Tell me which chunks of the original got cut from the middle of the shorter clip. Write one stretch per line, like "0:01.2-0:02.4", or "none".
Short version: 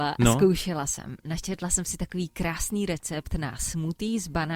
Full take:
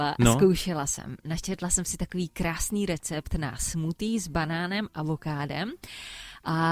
none